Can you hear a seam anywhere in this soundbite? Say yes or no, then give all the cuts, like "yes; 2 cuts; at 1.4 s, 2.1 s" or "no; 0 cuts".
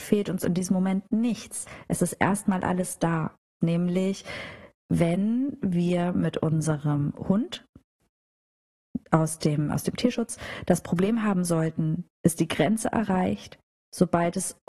yes; 3 cuts; at 3.6 s, 4.7 s, 12.1 s